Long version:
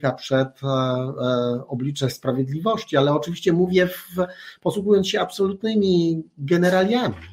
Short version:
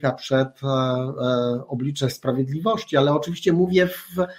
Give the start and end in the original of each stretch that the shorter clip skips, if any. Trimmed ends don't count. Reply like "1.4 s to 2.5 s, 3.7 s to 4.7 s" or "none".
none

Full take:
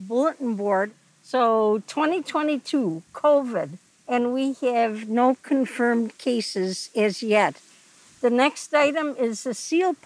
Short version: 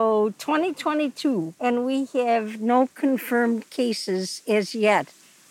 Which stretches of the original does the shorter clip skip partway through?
3.0 s to 4.0 s

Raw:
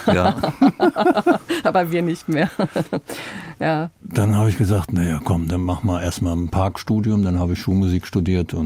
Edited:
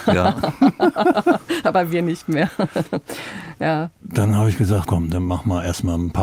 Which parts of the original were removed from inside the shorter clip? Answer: 4.9 s to 5.2 s

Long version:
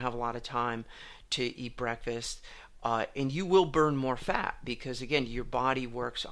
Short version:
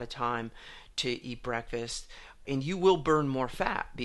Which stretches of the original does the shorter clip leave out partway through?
2.8 s to 3.1 s

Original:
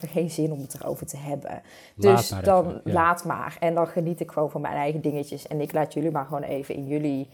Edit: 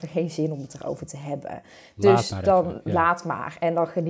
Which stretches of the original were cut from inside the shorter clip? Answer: none

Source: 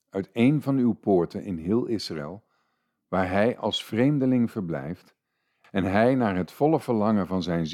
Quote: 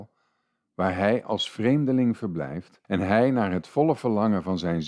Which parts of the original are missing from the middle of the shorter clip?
5.2 s to 5.7 s

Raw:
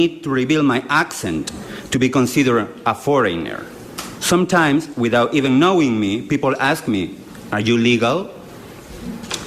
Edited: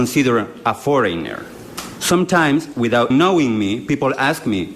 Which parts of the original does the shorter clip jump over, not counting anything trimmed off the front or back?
5.3 s to 5.5 s

